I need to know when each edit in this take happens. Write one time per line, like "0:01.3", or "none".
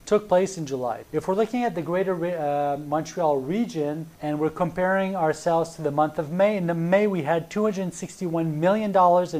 0:01.0
0:04.1

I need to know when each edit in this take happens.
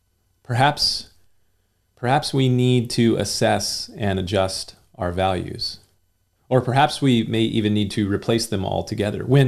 none

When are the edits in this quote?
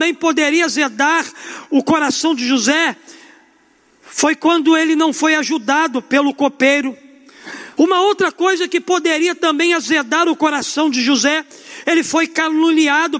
0:07.8

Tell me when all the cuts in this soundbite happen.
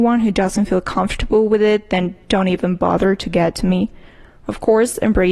none

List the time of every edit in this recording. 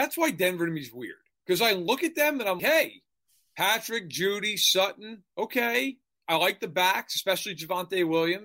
0:02.6

